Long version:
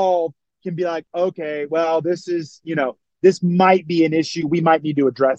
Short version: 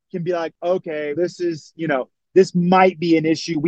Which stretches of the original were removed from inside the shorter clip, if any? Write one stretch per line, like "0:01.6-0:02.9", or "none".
0:01.7-0:02.0